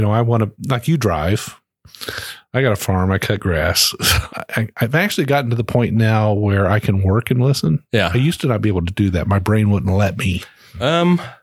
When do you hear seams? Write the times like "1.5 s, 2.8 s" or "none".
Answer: 4.3 s